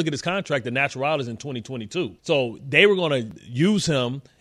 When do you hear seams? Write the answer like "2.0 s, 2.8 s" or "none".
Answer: 2.2 s

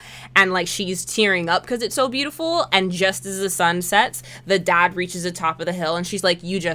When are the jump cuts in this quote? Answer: none

